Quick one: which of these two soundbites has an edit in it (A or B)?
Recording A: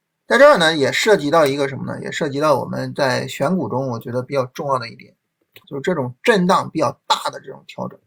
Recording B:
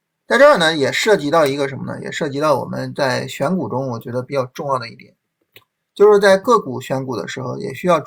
A